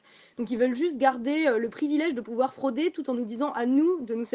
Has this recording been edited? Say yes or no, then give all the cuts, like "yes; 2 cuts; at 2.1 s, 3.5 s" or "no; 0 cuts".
no; 0 cuts